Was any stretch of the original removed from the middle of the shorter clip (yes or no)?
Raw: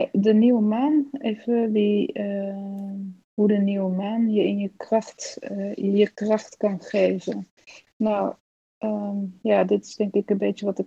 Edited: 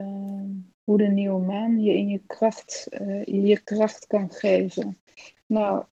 no